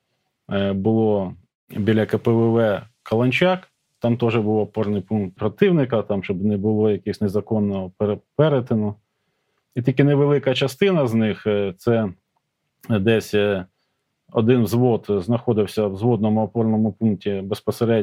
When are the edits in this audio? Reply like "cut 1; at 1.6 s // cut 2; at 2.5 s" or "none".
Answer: cut 1; at 5.4 s